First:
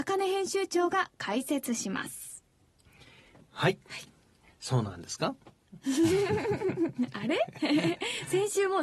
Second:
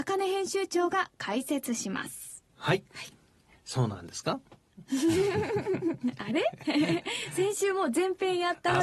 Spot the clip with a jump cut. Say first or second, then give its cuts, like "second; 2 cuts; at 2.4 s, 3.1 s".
second; 1 cut; at 2.5 s